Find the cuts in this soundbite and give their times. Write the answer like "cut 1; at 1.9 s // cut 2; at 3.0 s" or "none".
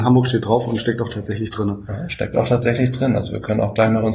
none